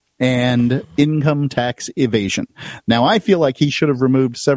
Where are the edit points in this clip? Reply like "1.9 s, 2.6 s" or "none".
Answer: 2.8 s